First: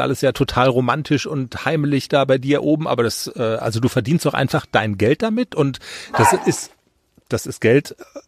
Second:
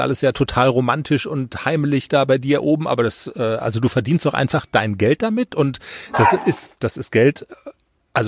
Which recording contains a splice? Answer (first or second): second